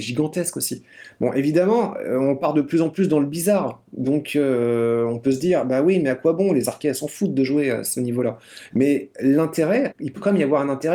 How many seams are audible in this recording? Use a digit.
2